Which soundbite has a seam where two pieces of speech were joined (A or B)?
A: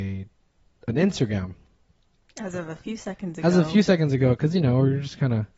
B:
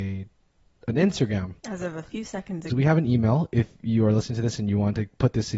B